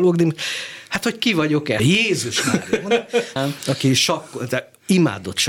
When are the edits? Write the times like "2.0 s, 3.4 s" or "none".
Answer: 1.8 s, 3.4 s